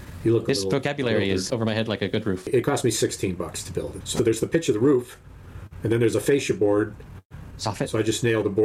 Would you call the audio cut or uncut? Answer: cut